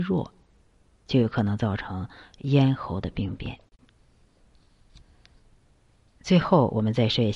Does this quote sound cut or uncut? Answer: uncut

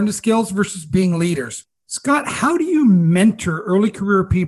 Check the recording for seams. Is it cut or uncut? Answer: uncut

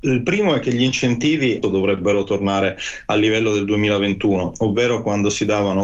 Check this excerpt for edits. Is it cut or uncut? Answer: cut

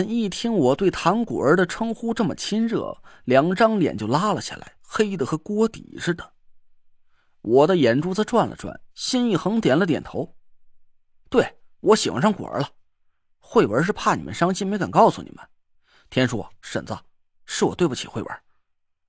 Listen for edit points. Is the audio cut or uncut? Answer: uncut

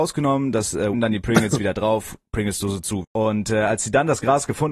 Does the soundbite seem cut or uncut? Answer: cut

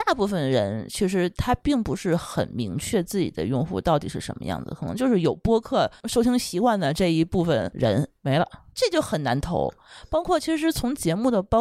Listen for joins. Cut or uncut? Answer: cut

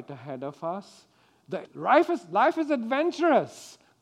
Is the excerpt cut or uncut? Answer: cut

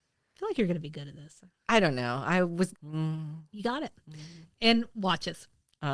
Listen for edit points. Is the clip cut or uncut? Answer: cut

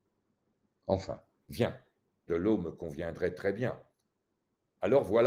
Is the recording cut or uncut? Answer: cut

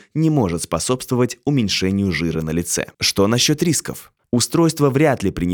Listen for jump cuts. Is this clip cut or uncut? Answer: cut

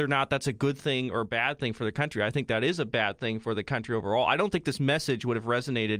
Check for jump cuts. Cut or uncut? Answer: uncut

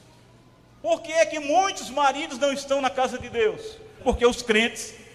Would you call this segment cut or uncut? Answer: cut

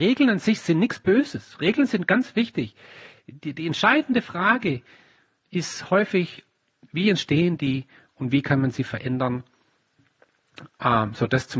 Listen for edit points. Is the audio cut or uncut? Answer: uncut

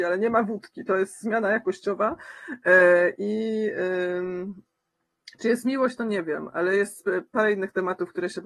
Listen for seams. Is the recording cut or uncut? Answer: uncut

